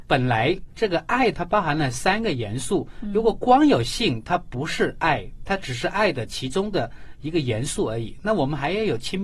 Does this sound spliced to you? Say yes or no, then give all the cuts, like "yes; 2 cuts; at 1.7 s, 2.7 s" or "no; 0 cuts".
no; 0 cuts